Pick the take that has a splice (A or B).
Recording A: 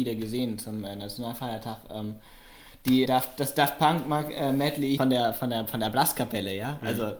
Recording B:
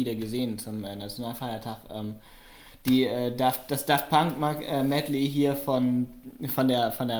A